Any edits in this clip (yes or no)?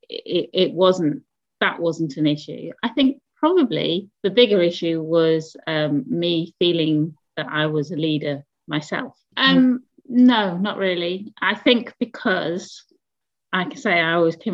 yes